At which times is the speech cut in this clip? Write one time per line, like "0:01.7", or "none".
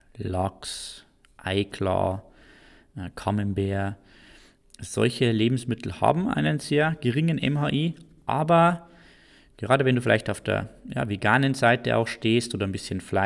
none